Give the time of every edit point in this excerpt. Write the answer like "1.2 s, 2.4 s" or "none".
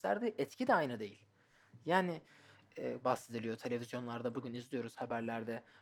3.0 s